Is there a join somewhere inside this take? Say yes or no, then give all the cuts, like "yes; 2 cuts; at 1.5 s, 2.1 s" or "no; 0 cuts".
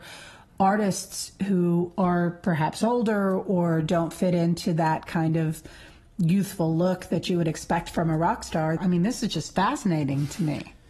yes; 1 cut; at 8.8 s